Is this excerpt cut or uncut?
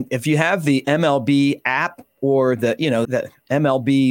cut